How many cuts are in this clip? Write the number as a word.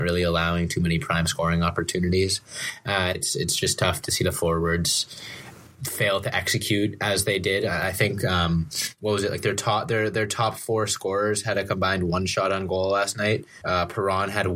two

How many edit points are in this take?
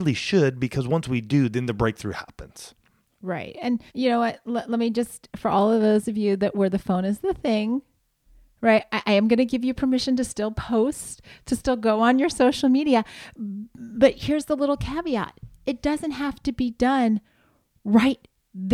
one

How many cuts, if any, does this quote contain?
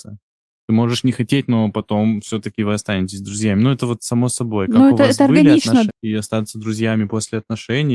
one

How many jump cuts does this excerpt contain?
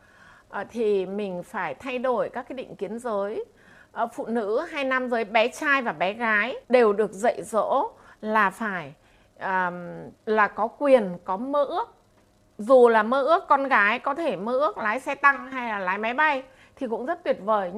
two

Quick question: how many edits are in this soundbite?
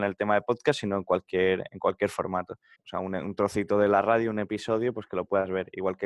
one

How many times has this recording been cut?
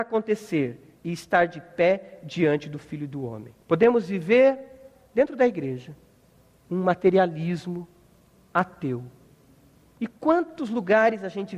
two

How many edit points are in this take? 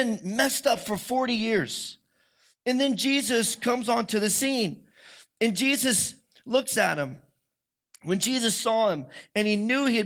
zero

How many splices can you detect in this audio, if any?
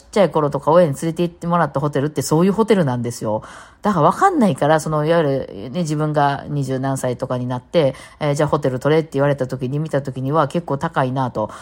zero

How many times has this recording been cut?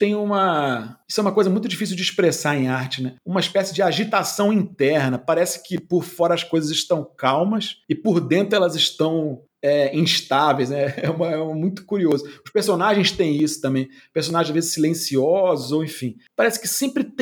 zero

